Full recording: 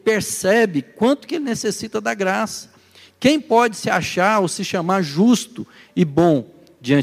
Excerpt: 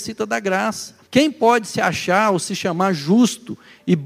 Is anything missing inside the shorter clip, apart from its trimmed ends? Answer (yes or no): yes